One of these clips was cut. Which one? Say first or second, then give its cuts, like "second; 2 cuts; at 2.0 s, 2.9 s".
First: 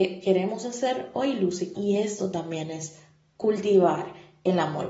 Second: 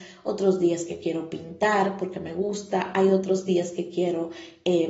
first; 1 cut; at 1.7 s